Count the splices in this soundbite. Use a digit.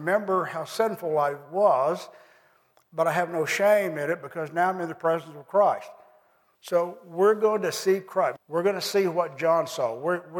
2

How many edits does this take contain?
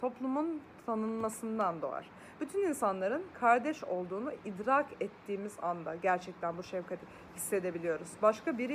0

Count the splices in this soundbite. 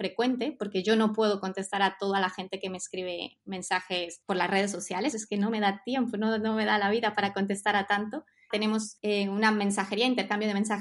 2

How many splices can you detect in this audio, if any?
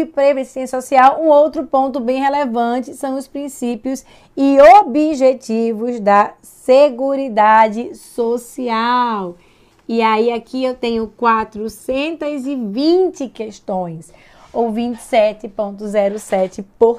0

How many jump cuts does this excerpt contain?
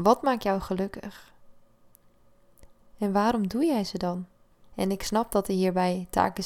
2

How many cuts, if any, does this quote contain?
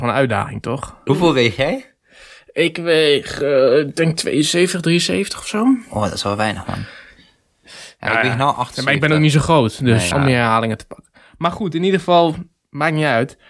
2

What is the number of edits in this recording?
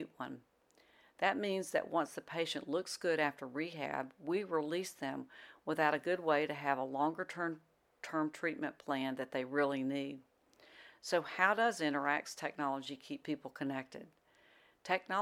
0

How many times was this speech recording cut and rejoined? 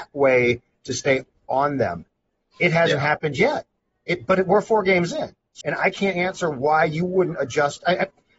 1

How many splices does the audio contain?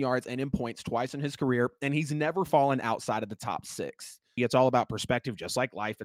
1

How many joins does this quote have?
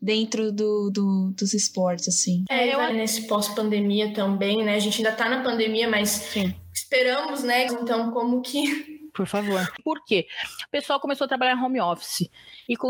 3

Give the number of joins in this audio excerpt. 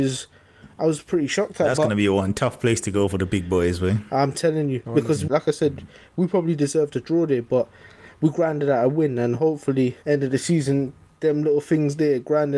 2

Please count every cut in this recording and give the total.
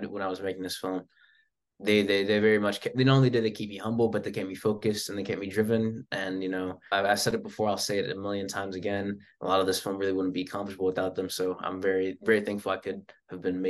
1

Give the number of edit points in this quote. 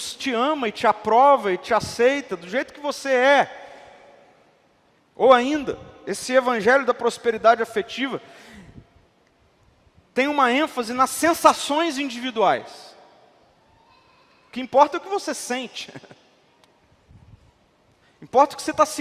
1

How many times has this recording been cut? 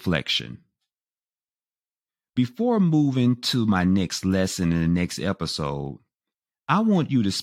0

